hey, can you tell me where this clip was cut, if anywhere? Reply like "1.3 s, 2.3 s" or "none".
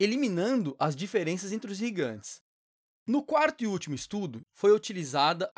2.9 s, 4.5 s